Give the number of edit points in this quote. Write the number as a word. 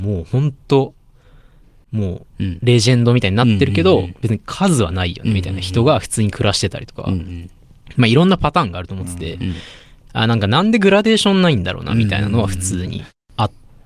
zero